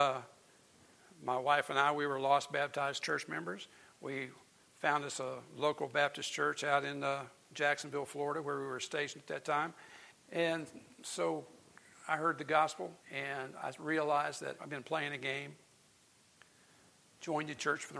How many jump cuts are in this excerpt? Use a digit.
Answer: 3